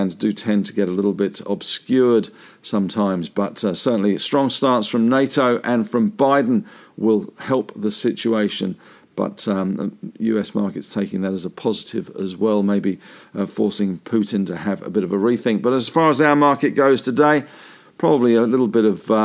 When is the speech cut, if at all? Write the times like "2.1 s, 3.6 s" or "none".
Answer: none